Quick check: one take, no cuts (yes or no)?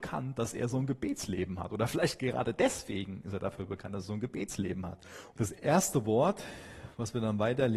no